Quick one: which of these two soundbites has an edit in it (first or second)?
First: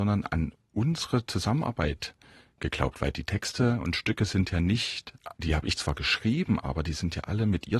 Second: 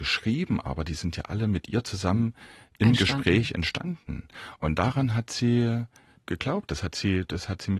first